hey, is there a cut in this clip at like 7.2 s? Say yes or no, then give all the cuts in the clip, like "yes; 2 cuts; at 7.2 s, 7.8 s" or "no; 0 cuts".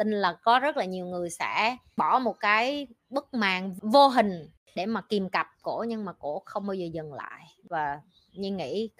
no; 1 cut; at 3.0 s